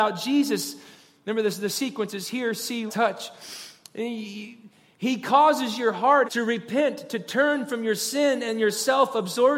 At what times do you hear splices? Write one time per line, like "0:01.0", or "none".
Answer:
0:02.9
0:06.2